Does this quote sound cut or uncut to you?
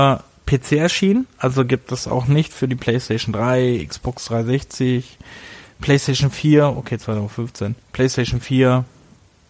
uncut